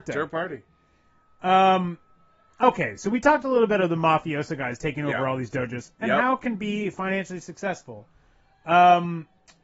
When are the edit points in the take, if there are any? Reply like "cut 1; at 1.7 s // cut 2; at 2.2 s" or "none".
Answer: none